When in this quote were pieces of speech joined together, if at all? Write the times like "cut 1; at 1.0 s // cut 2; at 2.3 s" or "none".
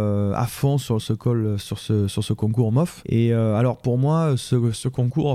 cut 1; at 3.0 s